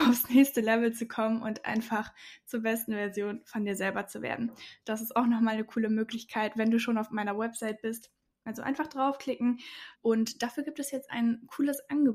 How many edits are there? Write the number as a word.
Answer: three